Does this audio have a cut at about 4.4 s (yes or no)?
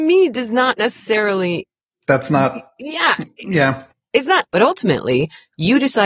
yes